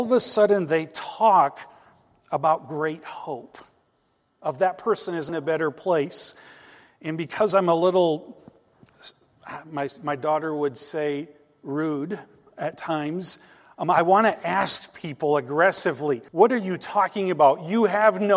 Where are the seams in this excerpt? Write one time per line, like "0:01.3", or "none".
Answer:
0:05.3
0:16.3